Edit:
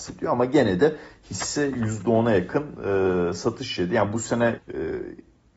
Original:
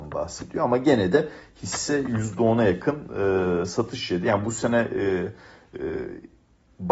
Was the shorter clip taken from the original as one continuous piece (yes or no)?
no